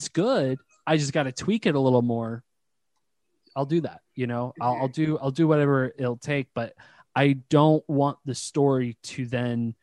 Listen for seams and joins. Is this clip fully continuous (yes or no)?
yes